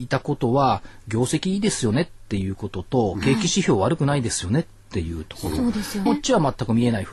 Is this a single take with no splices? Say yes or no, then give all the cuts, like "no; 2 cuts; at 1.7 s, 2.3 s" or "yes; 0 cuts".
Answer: no; 1 cut; at 6.1 s